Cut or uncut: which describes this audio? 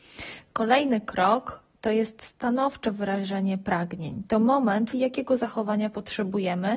cut